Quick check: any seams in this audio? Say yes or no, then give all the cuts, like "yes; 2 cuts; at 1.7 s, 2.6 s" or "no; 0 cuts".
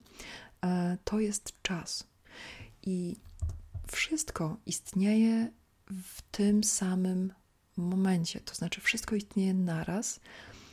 no; 0 cuts